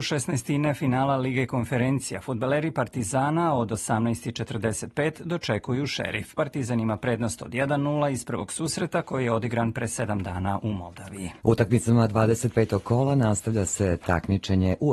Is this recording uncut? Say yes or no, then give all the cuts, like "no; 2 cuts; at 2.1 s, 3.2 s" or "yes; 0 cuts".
no; 1 cut; at 11.4 s